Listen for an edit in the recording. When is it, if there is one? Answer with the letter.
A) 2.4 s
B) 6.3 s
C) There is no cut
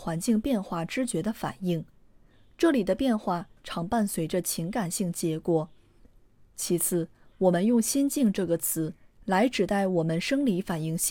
C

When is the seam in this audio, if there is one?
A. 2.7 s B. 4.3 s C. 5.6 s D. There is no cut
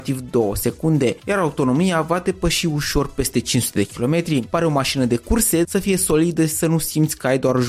C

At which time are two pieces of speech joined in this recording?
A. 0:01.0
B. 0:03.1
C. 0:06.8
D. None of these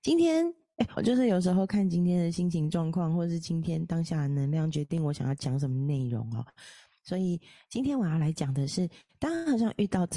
A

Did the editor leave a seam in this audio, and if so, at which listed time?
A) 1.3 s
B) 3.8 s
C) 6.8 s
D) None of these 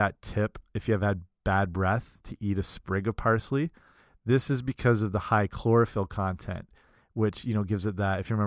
D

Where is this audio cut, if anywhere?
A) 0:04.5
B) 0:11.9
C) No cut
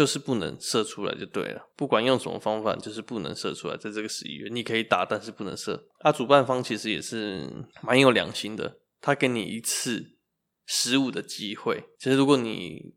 C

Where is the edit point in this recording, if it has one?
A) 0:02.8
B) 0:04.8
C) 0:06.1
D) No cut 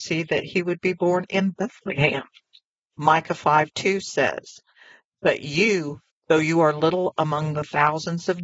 C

